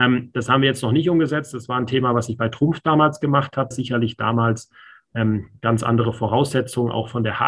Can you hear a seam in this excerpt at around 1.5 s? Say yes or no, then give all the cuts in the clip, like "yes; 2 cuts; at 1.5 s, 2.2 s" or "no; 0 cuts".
no; 1 cut; at 3.7 s